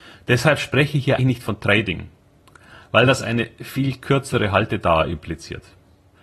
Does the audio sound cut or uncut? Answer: cut